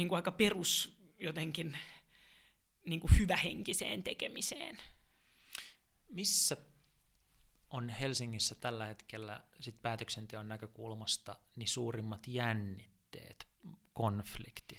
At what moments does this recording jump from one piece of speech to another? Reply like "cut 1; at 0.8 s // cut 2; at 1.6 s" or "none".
none